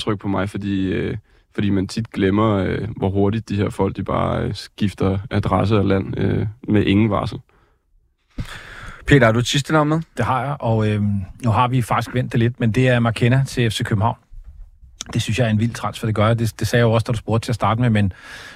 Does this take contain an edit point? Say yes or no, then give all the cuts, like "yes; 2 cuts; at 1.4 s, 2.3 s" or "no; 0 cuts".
no; 0 cuts